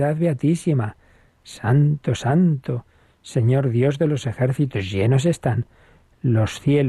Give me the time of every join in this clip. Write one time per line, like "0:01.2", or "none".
0:02.2

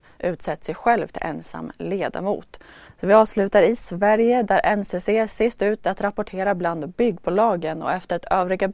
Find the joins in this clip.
0:02.9

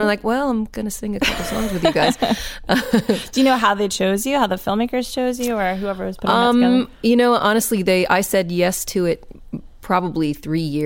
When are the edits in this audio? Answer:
none

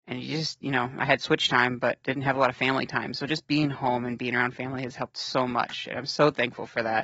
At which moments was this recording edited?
none

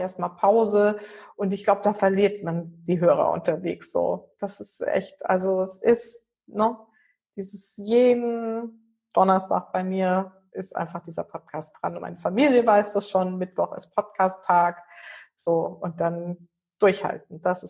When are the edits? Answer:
none

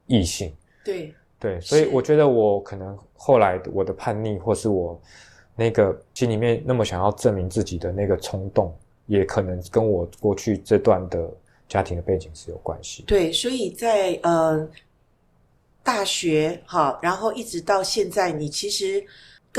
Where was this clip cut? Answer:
none

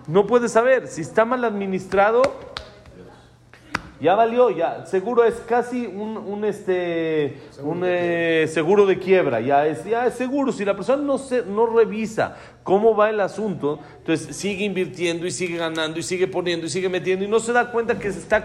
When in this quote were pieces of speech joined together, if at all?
none

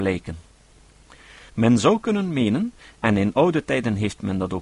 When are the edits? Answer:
0:01.5

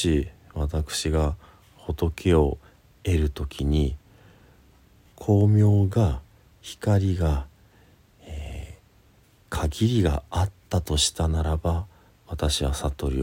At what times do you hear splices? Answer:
none

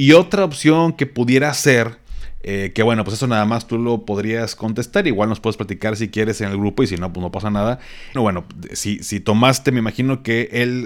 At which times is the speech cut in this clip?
0:08.2

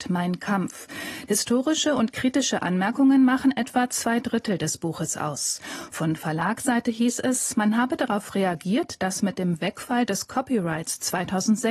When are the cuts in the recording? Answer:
0:01.3

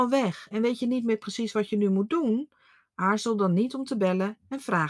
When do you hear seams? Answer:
none

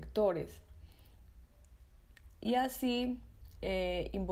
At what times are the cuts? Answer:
none

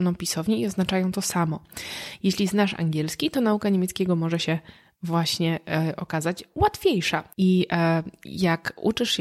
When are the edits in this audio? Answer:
0:07.3

